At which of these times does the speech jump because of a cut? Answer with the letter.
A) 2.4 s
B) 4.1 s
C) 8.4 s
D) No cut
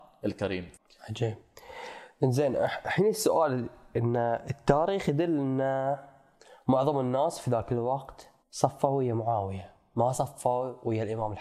C